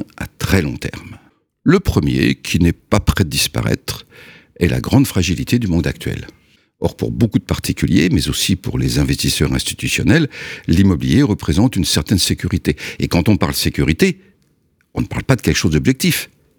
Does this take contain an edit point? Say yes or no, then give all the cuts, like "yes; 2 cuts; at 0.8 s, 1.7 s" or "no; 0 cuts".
no; 0 cuts